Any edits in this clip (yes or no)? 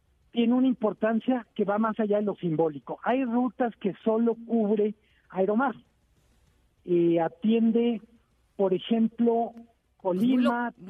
no